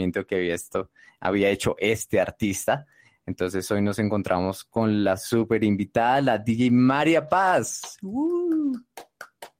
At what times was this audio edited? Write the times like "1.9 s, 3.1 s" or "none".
none